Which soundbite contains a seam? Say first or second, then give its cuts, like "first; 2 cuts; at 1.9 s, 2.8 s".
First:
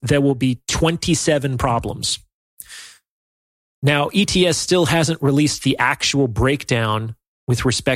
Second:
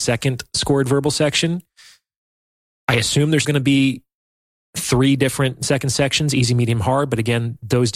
second; 1 cut; at 3.4 s